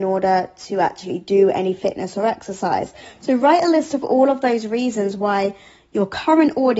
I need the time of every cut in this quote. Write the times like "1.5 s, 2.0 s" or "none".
none